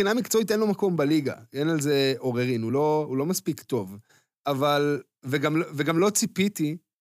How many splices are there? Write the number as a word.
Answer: zero